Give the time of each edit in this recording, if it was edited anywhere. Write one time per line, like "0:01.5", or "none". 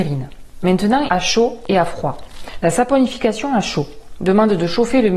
0:01.1